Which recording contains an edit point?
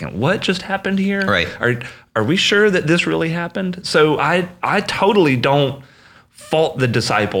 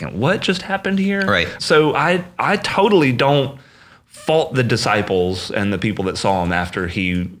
second; 1 cut; at 1.6 s

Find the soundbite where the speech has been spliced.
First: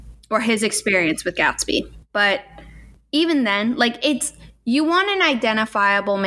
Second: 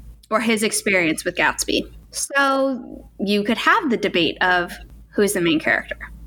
first; 1 cut; at 2.0 s

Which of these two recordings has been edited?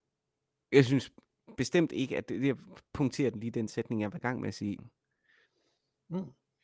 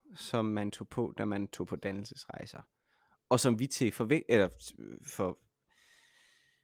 first; 1 cut; at 4.8 s

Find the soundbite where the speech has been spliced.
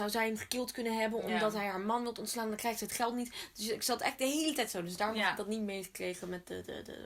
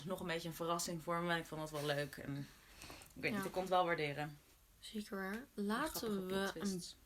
second; 1 cut; at 5.5 s

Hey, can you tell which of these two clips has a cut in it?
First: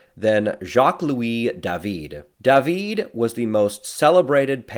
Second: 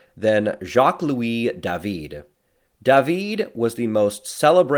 first; 1 cut; at 2.3 s

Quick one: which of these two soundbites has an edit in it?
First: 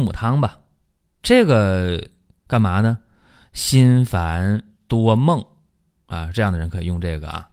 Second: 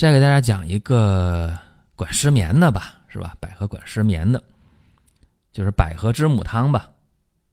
first; 1 cut; at 4.8 s

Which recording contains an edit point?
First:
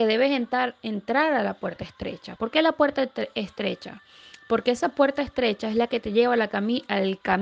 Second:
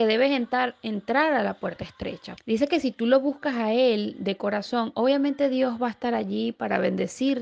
second; 1 cut; at 2.4 s

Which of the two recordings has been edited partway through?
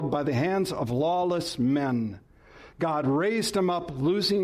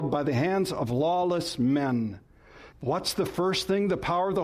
second; 1 cut; at 2.7 s

